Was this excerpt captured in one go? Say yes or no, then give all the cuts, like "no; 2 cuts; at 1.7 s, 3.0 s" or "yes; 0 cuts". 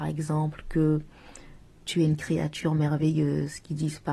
yes; 0 cuts